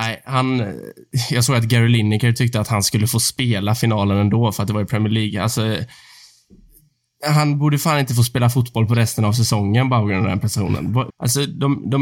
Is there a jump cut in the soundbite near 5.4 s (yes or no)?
no